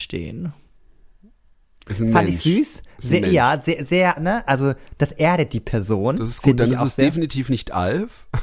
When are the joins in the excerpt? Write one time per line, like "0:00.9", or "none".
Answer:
0:04.2